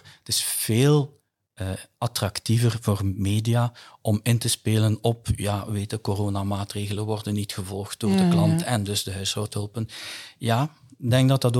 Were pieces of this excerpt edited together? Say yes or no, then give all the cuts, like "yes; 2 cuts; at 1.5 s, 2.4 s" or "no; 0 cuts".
no; 0 cuts